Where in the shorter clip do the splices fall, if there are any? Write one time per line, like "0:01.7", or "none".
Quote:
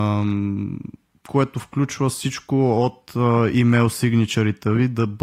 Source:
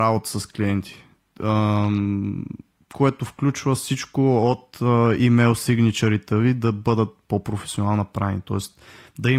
none